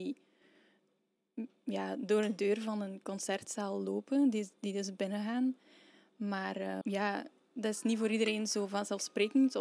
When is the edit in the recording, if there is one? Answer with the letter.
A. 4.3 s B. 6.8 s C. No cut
B